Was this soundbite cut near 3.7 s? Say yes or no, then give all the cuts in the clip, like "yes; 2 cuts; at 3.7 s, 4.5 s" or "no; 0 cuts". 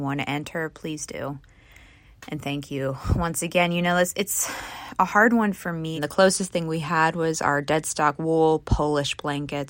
no; 1 cut; at 6.0 s